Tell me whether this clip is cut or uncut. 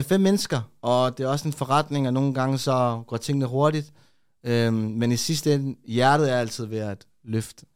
uncut